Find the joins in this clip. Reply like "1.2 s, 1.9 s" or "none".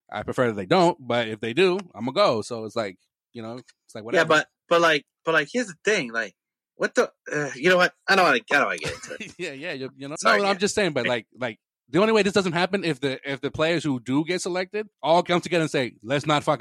10.2 s, 14.9 s